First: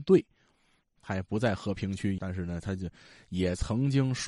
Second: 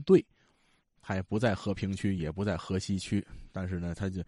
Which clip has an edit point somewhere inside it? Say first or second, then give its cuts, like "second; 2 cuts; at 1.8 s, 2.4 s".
first; 1 cut; at 2.2 s